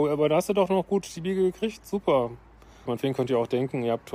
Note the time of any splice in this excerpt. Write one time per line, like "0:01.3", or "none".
0:02.9